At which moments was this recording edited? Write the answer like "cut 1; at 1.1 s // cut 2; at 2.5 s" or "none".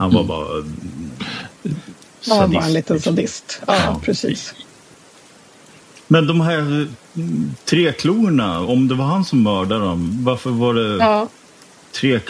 none